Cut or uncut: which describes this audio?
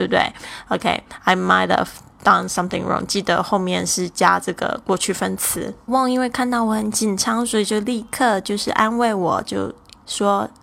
cut